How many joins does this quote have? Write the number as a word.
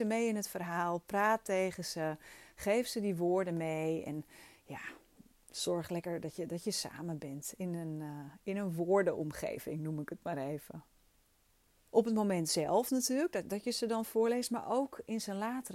one